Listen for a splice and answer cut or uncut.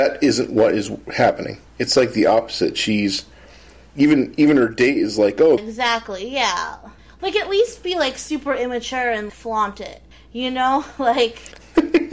cut